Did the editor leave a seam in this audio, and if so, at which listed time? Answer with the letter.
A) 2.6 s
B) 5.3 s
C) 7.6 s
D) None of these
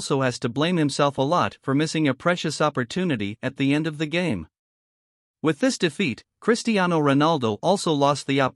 D